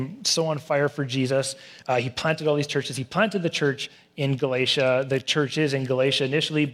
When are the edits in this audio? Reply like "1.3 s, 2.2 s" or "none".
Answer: none